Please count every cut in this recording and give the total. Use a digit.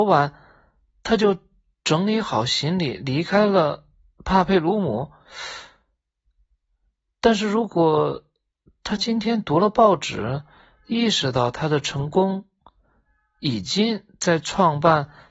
0